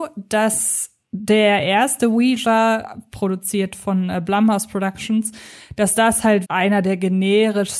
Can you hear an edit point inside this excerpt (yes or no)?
yes